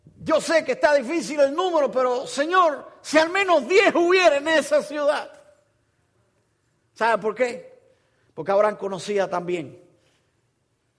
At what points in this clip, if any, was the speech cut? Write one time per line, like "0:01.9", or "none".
none

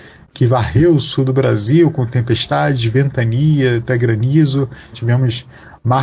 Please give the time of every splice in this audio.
0:04.9

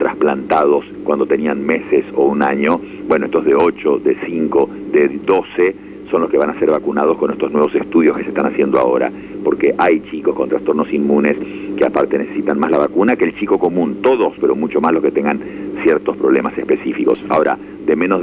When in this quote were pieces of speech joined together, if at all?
0:14.4

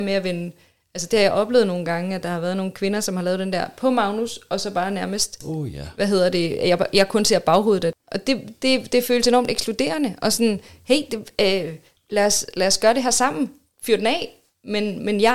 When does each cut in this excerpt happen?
none

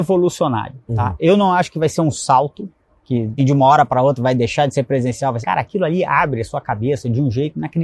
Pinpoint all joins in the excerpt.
0:03.4
0:05.4

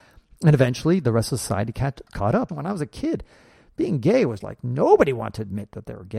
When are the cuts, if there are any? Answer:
0:02.5
0:04.4

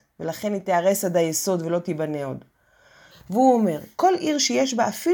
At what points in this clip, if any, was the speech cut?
0:03.1

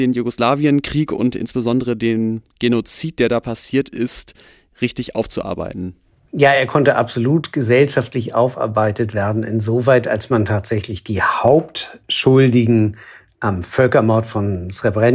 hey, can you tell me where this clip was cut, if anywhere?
none

